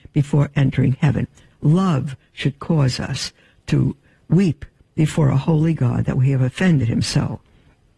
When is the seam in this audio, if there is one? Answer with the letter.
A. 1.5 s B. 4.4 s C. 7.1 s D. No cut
A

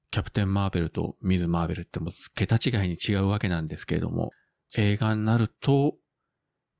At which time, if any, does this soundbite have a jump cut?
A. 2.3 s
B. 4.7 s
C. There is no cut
C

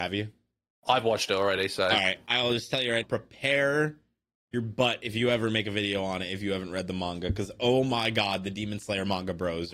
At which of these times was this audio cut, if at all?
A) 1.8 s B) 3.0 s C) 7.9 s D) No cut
B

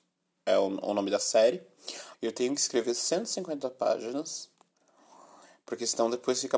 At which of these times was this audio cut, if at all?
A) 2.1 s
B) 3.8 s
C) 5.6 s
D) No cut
A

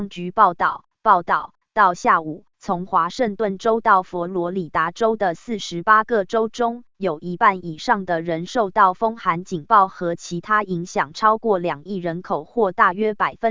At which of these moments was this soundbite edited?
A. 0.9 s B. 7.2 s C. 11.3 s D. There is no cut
D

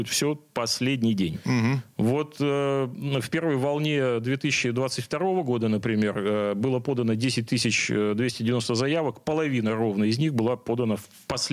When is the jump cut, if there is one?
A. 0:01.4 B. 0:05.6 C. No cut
C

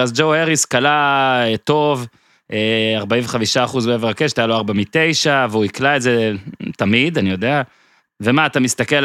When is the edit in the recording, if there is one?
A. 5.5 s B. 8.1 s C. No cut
B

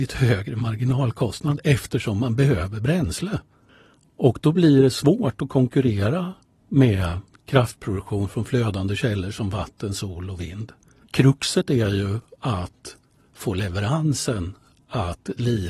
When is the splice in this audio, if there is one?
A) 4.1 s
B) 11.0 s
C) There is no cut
B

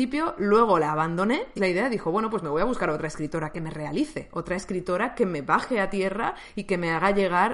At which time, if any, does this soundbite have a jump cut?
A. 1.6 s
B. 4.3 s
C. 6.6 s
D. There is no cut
A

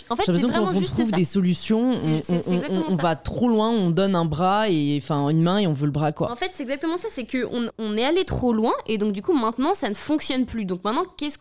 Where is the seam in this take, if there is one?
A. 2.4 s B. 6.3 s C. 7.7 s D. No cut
C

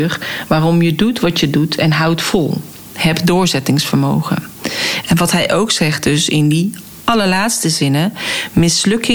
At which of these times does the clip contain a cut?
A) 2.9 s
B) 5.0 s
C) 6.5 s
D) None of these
B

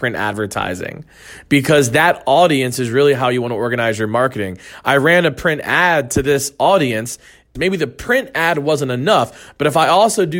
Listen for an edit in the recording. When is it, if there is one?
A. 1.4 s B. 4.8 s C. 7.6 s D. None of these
C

